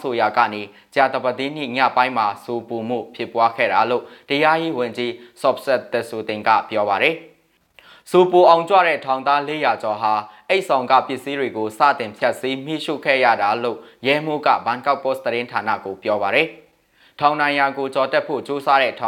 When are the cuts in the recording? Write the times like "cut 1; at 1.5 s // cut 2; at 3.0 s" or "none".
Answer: none